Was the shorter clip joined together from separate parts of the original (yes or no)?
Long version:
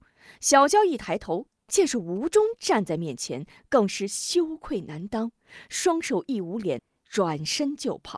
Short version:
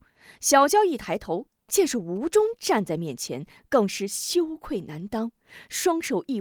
no